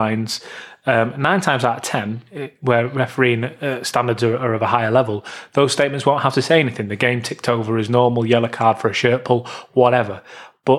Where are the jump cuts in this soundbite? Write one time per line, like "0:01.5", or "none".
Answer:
none